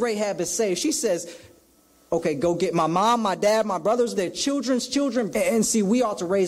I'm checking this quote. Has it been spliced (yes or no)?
yes